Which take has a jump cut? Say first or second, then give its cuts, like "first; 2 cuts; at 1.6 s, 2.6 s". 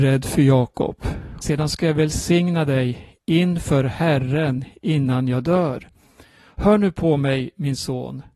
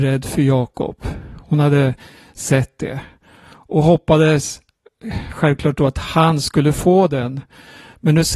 first; 1 cut; at 1.4 s